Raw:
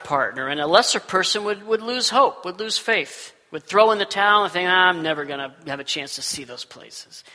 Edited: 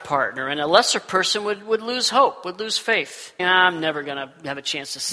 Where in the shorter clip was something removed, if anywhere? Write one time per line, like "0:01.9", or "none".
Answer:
0:03.4